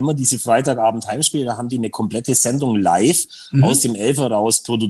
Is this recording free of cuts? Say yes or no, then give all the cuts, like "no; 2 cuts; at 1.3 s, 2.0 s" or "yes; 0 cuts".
yes; 0 cuts